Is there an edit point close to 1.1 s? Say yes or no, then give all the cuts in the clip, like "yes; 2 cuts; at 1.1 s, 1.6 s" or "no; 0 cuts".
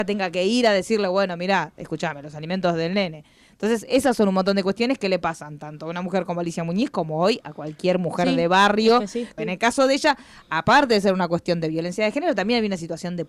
no; 1 cut; at 9.4 s